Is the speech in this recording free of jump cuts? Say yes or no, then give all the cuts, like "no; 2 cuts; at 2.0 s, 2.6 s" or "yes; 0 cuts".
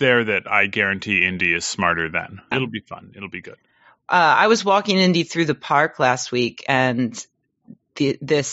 no; 1 cut; at 2.5 s